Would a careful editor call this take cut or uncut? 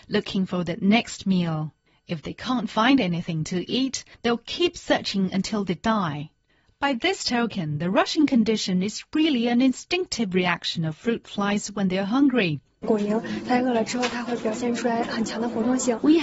uncut